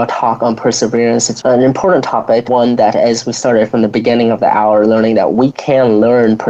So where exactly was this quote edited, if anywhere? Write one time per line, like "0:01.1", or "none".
0:01.4
0:02.5

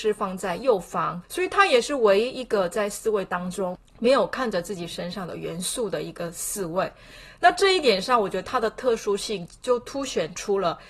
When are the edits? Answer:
0:01.2

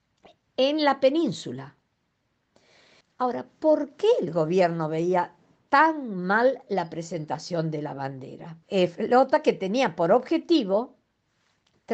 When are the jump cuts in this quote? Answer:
0:03.0
0:08.6

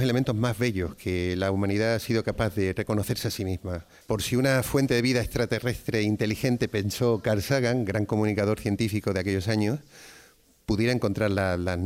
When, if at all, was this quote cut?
0:04.0

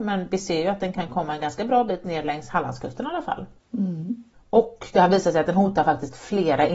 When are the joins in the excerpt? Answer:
none

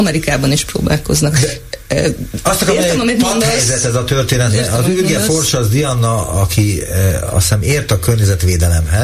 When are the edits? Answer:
none

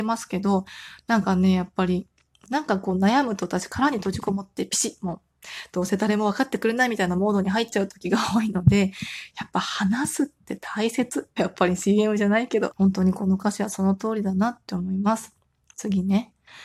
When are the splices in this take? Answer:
0:11.4
0:12.7

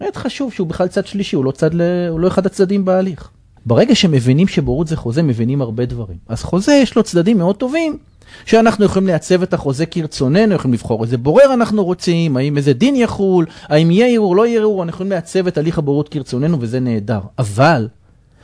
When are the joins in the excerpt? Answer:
0:03.6

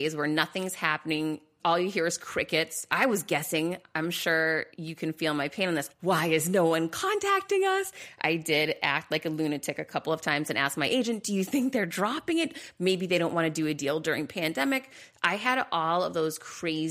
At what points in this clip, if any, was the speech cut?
0:02.9
0:06.0

